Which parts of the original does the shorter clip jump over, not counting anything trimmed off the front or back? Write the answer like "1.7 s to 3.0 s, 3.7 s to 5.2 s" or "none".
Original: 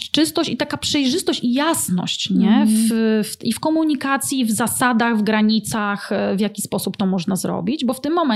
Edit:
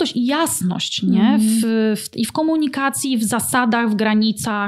none